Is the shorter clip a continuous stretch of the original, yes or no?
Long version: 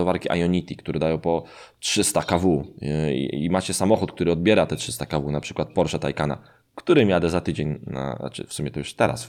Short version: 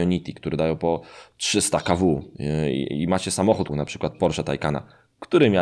no